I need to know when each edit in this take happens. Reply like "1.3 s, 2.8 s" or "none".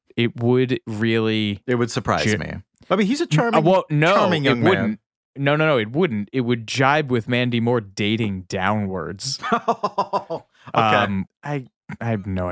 11.3 s